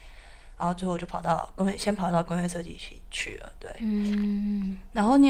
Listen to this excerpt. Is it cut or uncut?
uncut